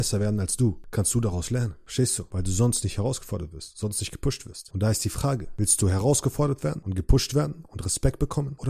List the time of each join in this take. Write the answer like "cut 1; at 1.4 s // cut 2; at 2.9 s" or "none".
none